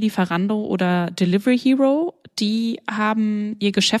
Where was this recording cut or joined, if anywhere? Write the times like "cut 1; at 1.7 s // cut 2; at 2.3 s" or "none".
none

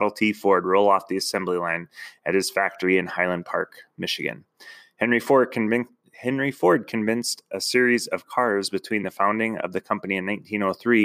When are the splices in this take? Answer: none

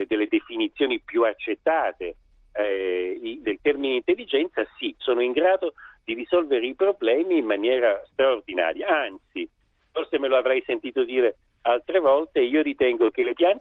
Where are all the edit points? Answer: cut 1; at 3.4 s // cut 2; at 5.0 s

